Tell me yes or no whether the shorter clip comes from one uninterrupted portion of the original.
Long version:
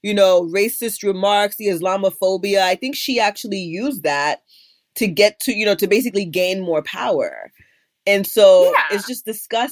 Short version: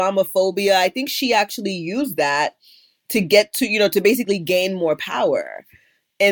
yes